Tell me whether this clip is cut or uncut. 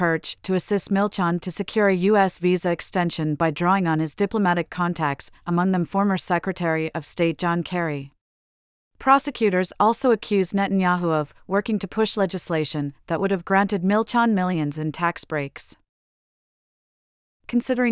uncut